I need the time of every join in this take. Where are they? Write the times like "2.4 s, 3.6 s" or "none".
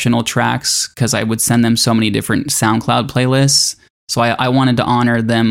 none